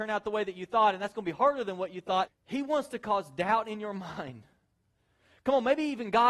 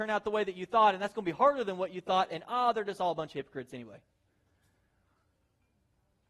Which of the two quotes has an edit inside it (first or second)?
first